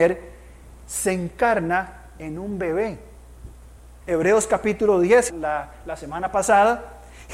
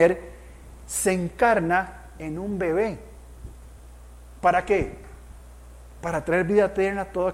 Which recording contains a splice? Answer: first; 2 cuts; at 4.0 s, 5.3 s

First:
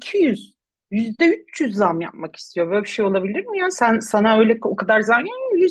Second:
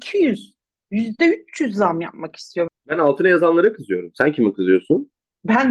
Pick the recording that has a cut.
second; 1 cut; at 2.7 s

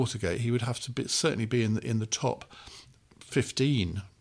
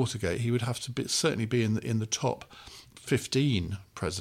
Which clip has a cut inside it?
second; 1 cut; at 2.9 s

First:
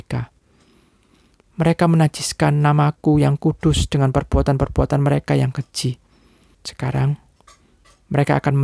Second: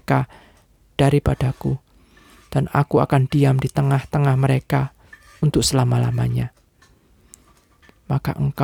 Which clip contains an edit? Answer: first; 1 cut; at 6.5 s

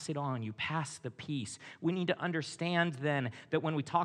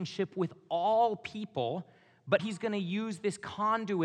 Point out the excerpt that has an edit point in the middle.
second; 1 cut; at 2.4 s

